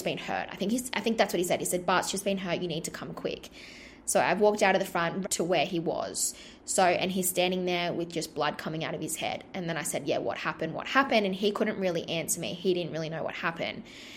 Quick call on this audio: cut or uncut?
cut